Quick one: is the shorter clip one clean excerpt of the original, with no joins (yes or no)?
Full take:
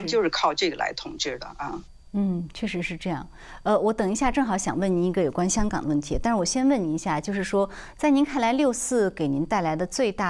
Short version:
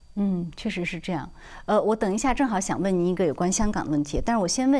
yes